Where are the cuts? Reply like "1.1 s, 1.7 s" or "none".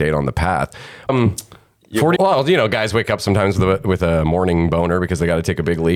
1.1 s, 2.2 s